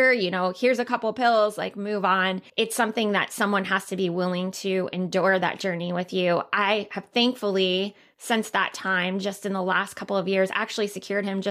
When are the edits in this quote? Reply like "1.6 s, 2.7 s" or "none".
2.5 s